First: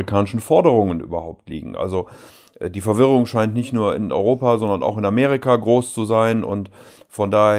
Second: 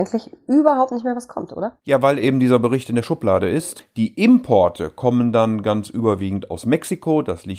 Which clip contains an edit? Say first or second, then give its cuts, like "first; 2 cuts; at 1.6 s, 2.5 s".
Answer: second; 1 cut; at 3.8 s